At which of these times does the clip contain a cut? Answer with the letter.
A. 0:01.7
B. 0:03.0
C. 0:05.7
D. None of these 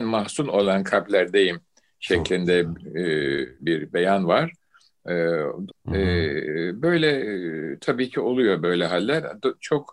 C